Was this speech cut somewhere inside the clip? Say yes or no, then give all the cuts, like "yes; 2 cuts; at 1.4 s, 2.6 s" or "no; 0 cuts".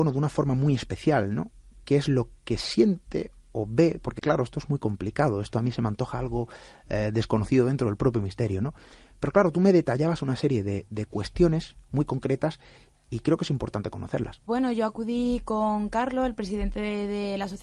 no; 0 cuts